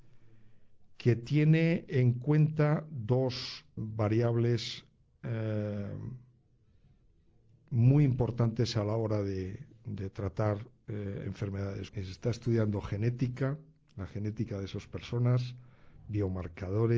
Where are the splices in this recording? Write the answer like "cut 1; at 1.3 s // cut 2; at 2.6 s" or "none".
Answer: cut 1; at 3.8 s // cut 2; at 11.9 s